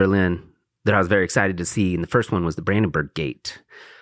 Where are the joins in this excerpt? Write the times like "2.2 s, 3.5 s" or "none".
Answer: none